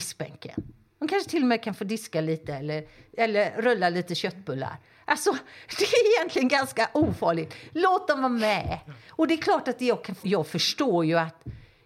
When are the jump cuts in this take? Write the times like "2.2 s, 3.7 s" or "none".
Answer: 10.2 s